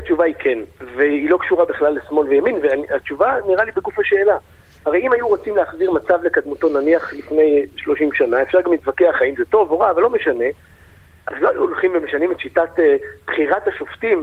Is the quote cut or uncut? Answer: uncut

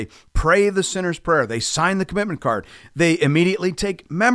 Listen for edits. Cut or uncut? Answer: uncut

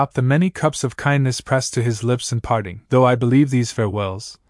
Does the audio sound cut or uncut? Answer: cut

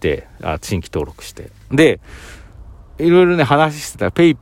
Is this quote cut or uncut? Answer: cut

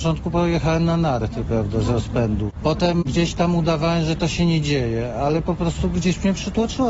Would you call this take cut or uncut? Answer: uncut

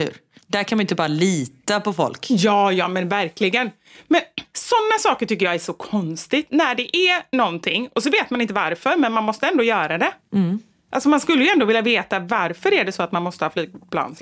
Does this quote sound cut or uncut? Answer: uncut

